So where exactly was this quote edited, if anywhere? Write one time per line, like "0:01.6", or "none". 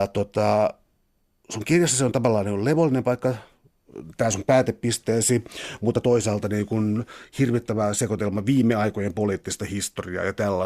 none

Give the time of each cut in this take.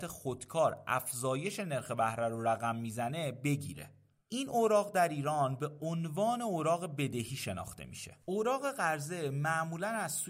0:08.2

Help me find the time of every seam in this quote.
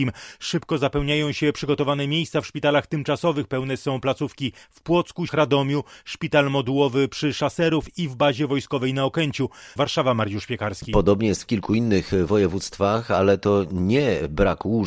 0:05.3
0:09.7

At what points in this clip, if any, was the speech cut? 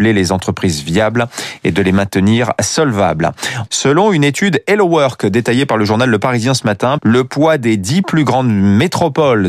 0:03.7
0:07.0

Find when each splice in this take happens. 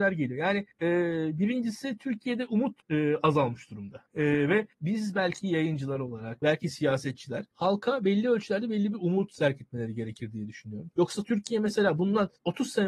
0:06.4
0:10.9

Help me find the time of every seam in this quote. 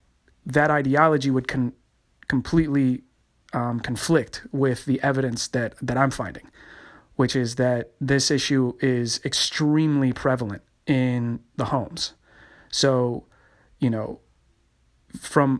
none

